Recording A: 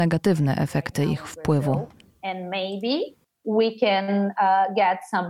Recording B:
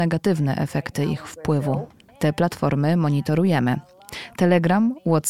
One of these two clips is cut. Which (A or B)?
B